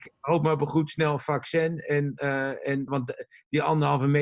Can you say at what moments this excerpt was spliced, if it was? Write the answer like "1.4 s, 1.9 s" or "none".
2.9 s